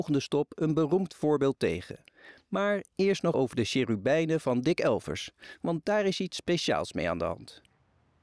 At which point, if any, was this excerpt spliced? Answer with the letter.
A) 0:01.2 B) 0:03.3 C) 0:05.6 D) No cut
B